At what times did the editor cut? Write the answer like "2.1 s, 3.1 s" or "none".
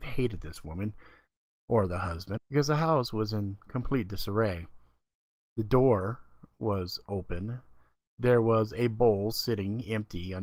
2.4 s